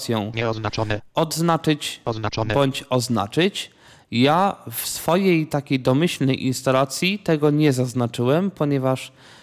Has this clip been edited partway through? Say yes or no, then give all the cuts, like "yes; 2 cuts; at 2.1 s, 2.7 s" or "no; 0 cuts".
no; 0 cuts